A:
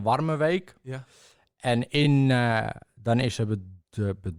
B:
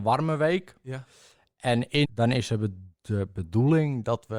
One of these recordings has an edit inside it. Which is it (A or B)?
B